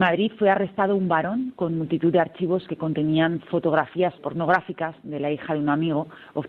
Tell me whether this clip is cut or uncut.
cut